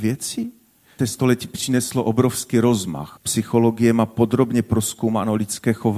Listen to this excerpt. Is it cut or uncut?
cut